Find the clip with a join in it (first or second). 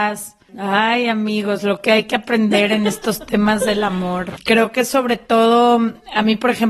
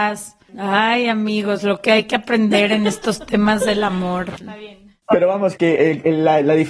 second